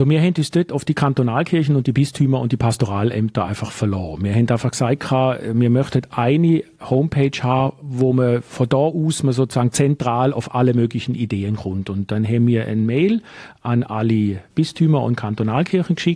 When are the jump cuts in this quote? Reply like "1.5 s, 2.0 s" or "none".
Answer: none